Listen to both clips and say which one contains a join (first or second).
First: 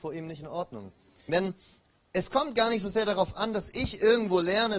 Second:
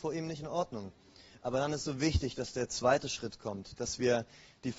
first